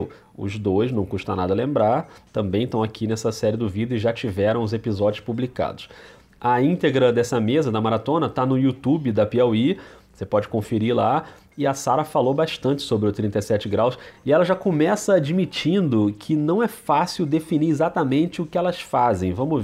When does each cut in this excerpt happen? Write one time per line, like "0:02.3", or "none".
none